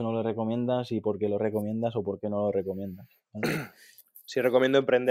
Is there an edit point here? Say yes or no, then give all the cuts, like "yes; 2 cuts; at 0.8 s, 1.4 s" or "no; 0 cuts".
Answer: no; 0 cuts